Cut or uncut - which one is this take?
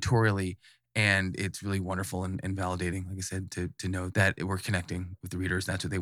uncut